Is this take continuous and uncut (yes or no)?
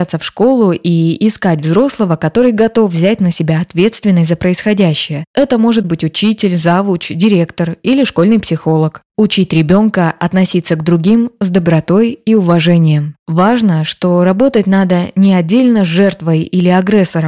no